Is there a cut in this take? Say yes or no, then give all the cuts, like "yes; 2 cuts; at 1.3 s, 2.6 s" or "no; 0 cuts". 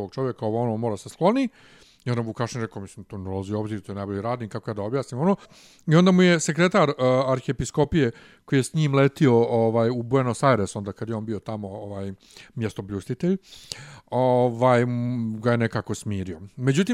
yes; 1 cut; at 5.4 s